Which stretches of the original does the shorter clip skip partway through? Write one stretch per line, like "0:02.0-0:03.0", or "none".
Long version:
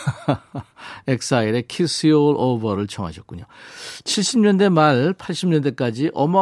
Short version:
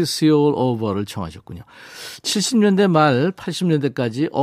none